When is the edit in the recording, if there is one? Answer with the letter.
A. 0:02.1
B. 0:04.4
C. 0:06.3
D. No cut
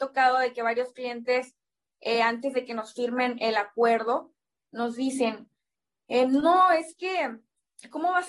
D